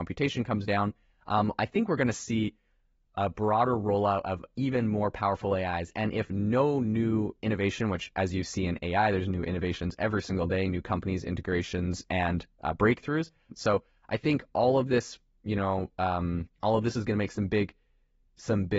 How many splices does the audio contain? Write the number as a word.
two